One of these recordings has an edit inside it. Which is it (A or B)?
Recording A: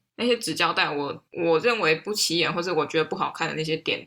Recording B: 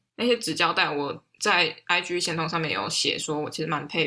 A